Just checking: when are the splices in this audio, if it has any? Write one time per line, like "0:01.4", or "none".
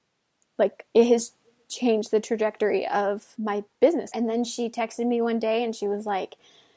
0:04.1